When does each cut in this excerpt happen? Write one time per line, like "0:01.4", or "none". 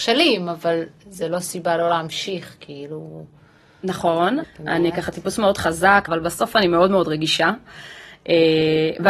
0:04.4
0:06.1